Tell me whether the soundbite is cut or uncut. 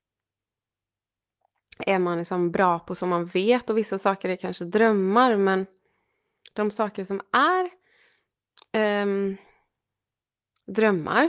uncut